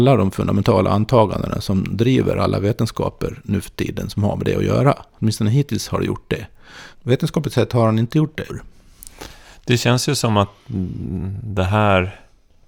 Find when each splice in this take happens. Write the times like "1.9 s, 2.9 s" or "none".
5.1 s, 6.9 s, 8.5 s